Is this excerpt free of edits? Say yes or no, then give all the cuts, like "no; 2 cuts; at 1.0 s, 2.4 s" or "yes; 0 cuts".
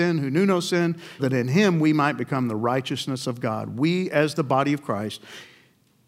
no; 1 cut; at 1.2 s